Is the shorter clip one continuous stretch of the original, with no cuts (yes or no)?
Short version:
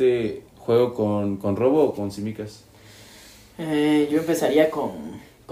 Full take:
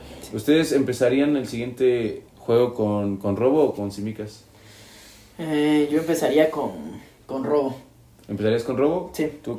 yes